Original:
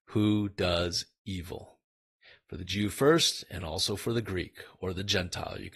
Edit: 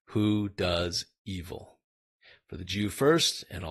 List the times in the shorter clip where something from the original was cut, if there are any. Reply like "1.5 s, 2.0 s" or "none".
none

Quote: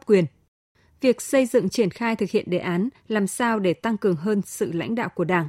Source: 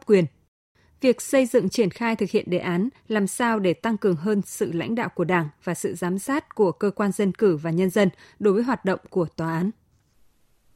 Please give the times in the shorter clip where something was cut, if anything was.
none

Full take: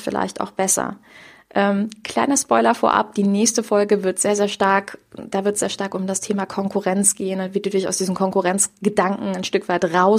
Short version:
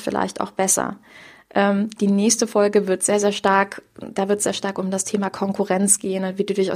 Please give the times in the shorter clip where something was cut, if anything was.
2.0 s

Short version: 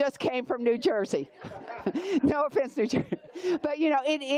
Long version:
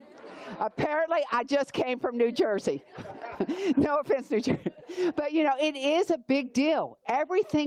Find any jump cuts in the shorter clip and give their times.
none

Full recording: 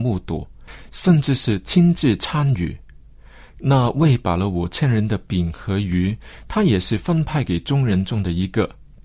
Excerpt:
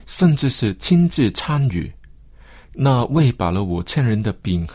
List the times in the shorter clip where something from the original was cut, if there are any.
none

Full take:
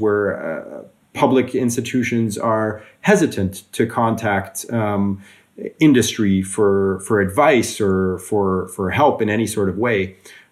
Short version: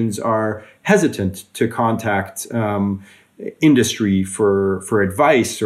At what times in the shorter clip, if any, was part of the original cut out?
none

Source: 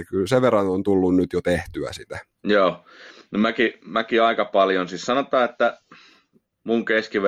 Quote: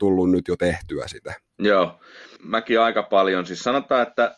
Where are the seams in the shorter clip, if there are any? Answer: 2.4 s

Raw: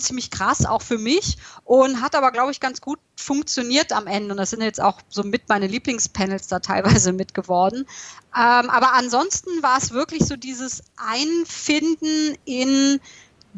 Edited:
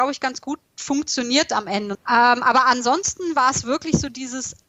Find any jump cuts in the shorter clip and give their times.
1.9 s

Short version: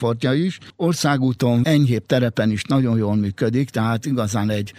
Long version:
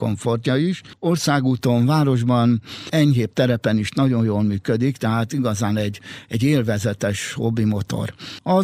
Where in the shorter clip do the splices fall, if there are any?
1.6 s

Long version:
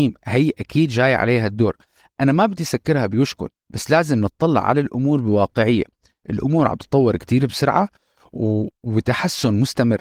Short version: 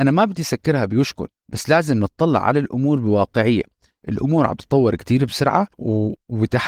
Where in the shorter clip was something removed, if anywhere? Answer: 5.7 s

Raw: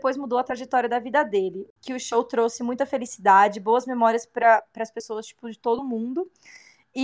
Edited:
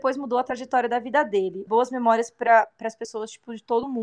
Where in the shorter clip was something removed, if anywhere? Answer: 1.7 s

